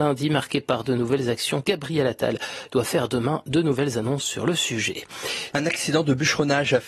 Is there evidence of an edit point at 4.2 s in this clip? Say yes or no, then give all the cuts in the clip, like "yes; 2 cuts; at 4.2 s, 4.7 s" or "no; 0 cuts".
no; 2 cuts; at 1.6 s, 5.5 s